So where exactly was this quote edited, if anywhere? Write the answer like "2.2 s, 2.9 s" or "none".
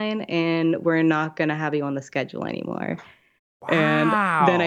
none